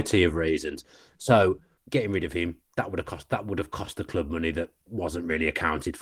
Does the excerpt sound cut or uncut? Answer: cut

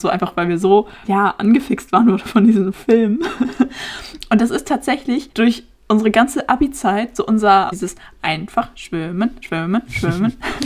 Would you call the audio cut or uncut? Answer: cut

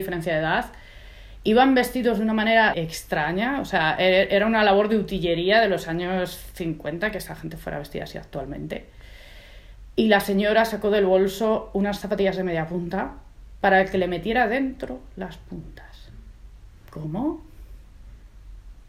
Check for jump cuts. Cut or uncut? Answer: cut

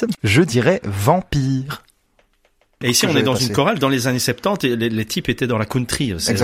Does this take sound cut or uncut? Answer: cut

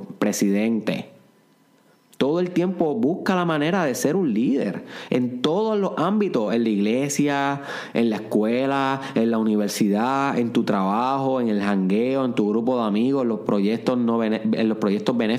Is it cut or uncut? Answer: uncut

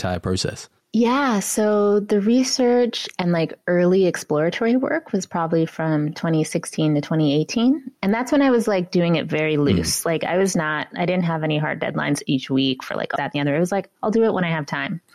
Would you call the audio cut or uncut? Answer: cut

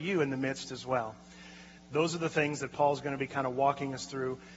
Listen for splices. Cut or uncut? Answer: cut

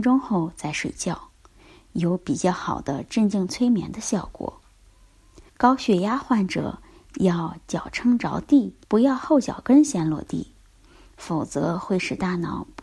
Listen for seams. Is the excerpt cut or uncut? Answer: cut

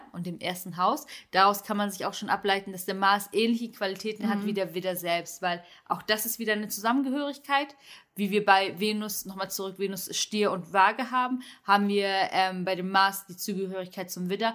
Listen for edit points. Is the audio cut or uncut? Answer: uncut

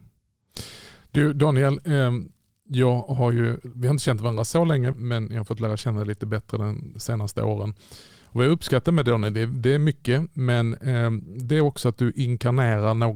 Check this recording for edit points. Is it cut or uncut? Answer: cut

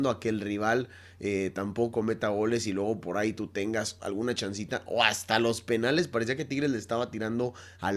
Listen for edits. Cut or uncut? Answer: uncut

